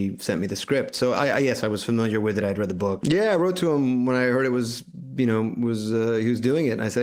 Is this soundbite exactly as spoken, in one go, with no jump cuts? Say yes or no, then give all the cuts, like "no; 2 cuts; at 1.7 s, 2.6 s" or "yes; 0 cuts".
no; 1 cut; at 3.0 s